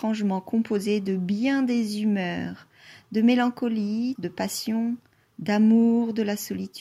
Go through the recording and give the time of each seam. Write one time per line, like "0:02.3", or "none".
0:04.2